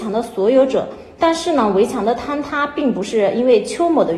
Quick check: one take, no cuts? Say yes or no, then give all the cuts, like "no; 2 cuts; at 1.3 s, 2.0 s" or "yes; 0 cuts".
yes; 0 cuts